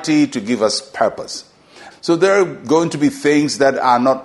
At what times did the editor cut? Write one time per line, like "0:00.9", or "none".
0:01.9